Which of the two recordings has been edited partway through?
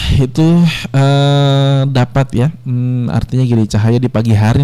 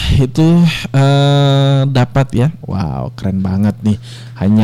second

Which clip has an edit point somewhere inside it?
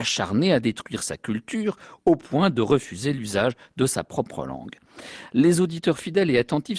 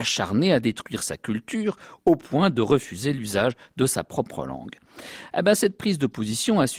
first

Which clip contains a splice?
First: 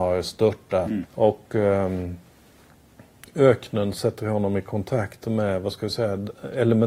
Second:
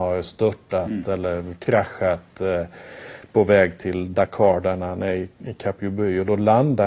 first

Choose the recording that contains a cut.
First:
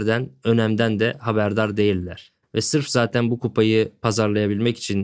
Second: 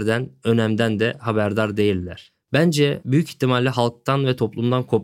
first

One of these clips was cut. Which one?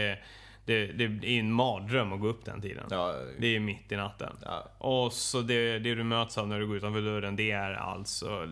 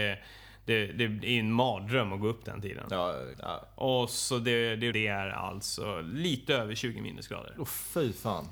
second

